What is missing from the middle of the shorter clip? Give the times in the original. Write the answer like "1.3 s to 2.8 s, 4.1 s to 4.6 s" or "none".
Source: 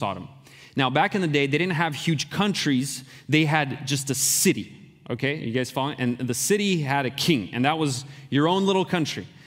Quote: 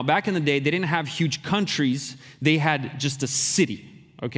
none